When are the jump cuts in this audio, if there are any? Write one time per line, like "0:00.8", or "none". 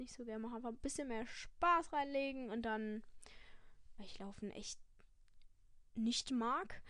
0:04.0